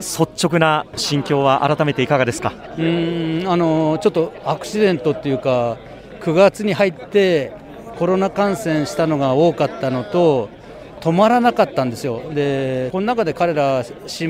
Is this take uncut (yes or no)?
yes